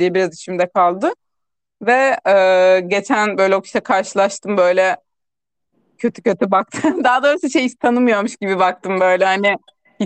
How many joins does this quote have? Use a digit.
0